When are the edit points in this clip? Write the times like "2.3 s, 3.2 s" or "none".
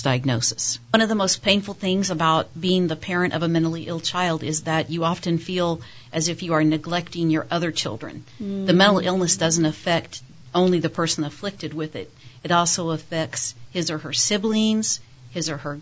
none